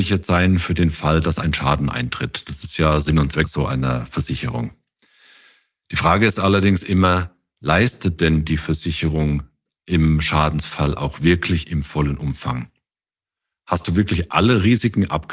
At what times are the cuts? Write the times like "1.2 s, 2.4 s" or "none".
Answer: none